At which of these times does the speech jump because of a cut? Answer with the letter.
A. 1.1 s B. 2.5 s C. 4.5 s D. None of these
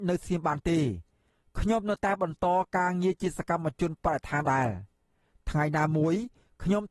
C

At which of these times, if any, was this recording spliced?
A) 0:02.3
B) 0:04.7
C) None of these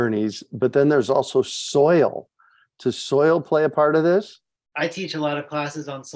B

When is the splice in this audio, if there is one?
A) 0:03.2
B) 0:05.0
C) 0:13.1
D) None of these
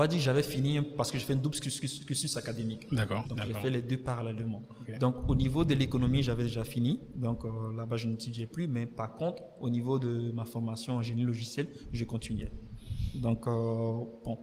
A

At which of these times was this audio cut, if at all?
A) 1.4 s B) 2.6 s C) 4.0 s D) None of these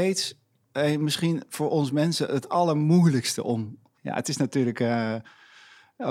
C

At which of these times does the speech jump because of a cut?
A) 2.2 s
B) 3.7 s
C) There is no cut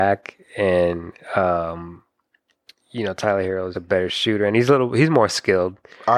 B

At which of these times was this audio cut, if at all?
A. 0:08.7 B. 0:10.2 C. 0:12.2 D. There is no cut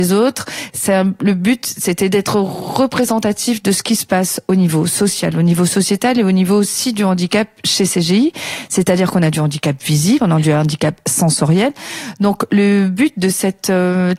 B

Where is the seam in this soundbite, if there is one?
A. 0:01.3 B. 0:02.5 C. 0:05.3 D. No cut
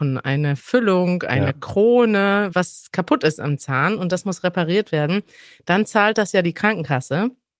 B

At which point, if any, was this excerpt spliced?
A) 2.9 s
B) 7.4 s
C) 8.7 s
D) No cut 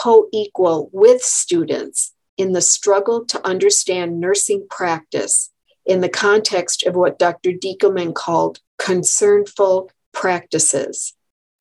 C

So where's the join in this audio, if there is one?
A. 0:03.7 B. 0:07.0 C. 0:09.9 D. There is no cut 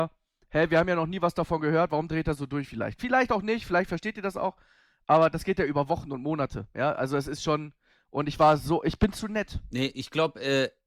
D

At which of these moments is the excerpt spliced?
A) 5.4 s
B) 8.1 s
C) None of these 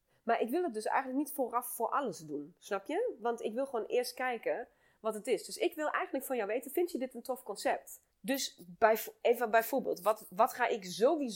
B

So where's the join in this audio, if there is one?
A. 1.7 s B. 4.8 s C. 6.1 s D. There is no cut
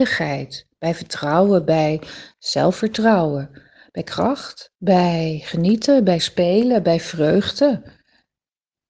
B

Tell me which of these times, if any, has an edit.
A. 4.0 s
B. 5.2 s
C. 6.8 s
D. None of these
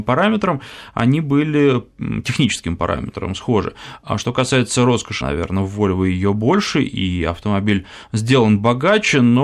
B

